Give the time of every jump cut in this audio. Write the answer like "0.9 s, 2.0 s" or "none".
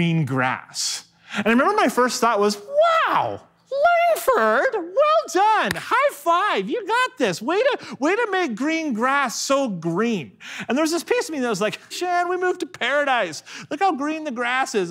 11.9 s